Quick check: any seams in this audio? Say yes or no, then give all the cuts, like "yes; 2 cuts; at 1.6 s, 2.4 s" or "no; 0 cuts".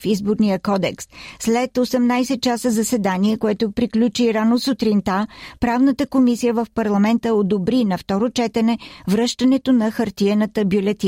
no; 0 cuts